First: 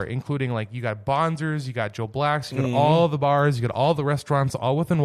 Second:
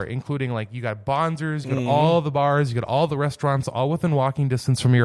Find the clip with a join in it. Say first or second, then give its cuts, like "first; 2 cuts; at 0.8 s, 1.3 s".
second; 1 cut; at 1.6 s